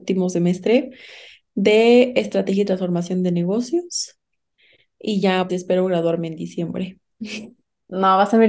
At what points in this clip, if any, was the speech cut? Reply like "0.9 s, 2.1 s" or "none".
5.5 s